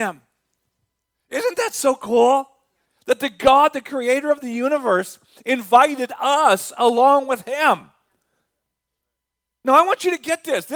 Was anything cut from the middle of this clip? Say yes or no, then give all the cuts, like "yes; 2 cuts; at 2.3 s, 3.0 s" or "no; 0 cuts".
no; 0 cuts